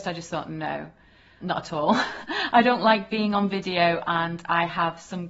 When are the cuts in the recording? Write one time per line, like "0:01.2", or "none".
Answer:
0:01.4